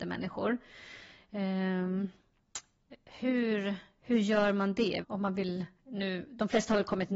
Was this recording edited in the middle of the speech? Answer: yes; 1 cut; at 5.0 s

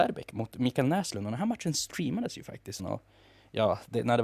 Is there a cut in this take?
yes; 1 cut; at 2.8 s

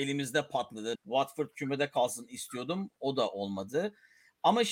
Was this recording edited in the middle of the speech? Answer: yes; 1 cut; at 0.9 s

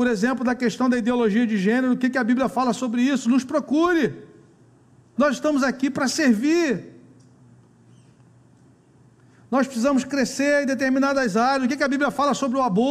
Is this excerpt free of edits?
no; 1 cut; at 5.2 s

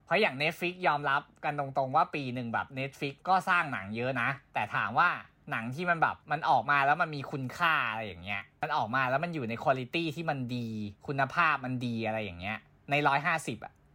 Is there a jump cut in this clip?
yes; 3 cuts; at 3.2 s, 6.2 s, 11.0 s

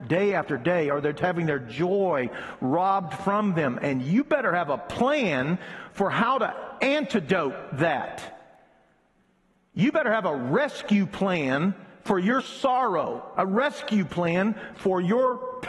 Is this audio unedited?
yes; 0 cuts

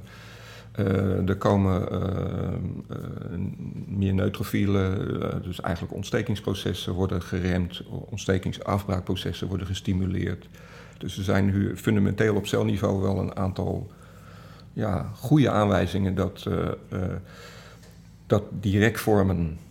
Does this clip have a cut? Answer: yes; 1 cut; at 18.3 s

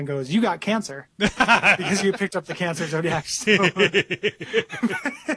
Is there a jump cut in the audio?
yes; 1 cut; at 1.8 s

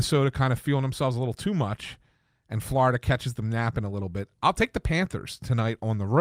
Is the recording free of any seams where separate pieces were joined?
yes; 0 cuts

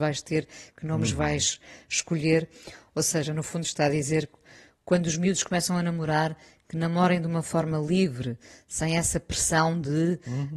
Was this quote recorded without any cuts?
yes; 0 cuts

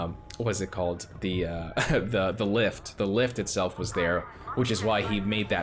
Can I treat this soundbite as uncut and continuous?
no; 1 cut; at 3.0 s

